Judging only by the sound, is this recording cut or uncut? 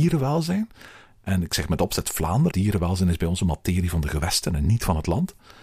cut